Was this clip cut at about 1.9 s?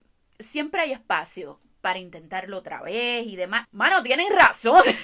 no; 1 cut; at 3.6 s

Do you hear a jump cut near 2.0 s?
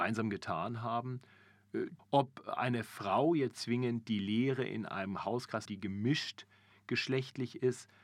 yes; 2 cuts; at 2.0 s, 5.7 s

